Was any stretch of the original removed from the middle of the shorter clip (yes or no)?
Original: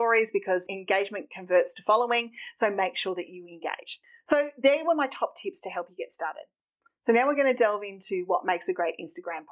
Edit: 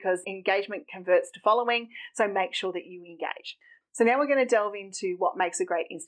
yes